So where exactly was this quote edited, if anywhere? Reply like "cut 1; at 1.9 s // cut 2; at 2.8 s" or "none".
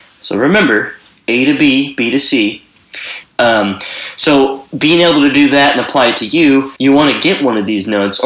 cut 1; at 3.2 s // cut 2; at 6.8 s